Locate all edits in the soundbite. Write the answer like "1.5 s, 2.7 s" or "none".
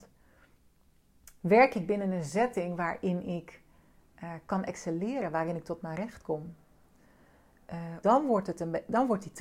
8.0 s